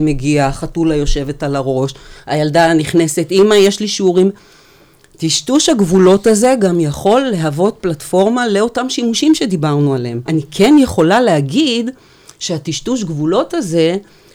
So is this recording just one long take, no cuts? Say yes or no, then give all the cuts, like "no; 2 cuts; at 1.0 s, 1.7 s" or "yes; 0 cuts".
no; 1 cut; at 10.3 s